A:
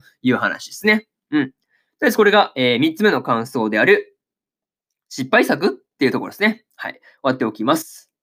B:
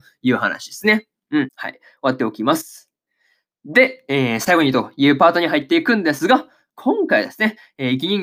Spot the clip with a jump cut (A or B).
B